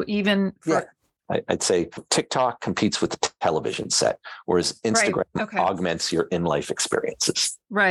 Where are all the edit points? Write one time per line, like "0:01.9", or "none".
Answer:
0:01.3